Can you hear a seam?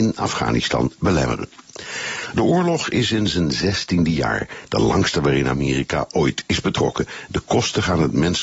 no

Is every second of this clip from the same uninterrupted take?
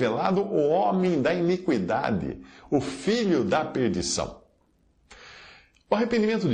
yes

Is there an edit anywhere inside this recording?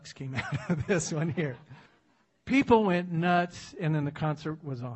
yes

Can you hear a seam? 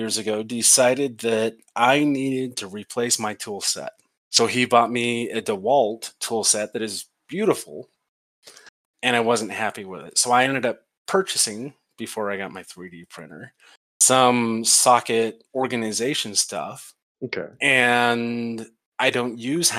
yes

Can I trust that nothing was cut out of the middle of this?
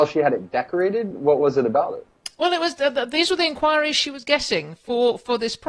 yes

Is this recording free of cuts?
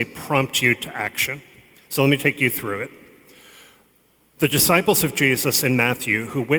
no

